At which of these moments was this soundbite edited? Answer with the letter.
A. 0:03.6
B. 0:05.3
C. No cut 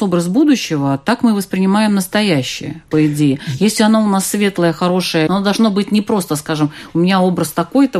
B